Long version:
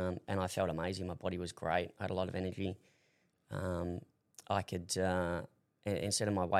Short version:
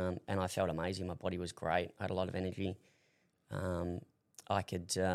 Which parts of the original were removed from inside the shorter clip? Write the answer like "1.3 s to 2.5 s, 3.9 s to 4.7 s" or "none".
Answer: none